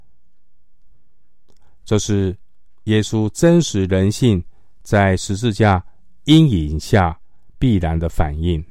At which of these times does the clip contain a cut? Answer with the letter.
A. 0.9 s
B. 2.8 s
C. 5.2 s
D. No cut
A